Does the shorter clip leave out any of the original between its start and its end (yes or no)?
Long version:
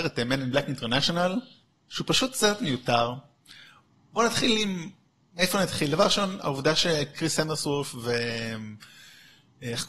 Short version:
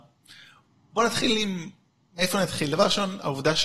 no